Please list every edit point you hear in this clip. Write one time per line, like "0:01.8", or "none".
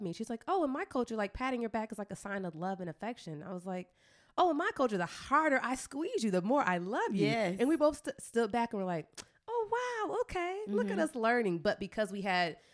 none